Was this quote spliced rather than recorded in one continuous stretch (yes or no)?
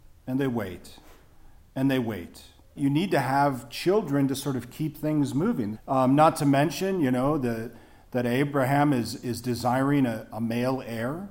yes